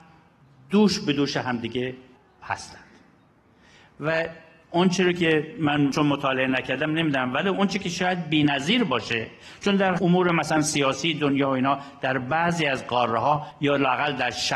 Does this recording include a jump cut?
no; 0 cuts

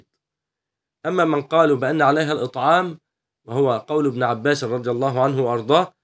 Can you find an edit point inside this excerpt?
no; 0 cuts

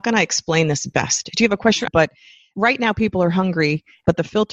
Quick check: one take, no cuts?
no; 1 cut; at 1.9 s

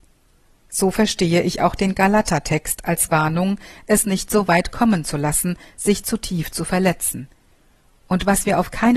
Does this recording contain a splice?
no; 0 cuts

